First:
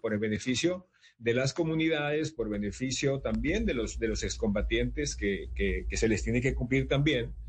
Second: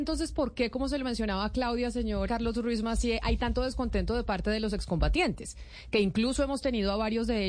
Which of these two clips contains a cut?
second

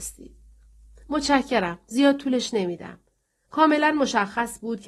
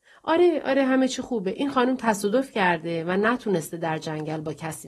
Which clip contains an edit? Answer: first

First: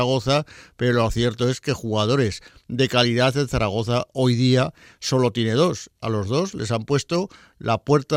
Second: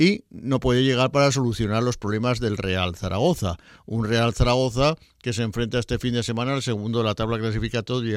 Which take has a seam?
first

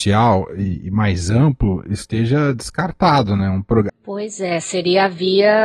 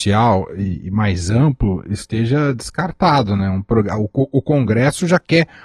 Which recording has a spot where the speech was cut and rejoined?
first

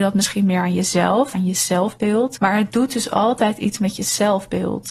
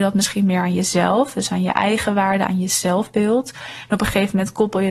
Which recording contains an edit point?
first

